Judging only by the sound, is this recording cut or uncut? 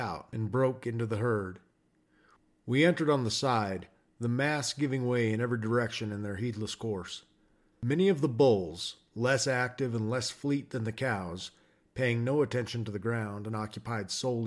uncut